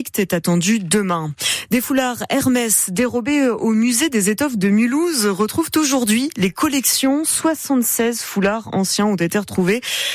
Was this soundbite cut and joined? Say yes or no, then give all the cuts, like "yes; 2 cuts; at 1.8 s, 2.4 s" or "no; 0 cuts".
no; 0 cuts